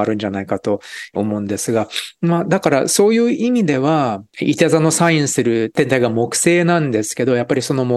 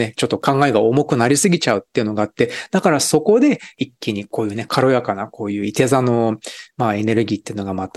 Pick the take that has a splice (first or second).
first